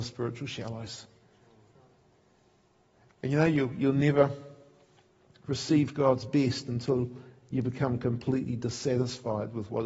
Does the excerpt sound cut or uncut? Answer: uncut